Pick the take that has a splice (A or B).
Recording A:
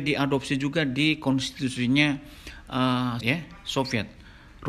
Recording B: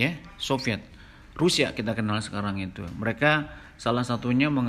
A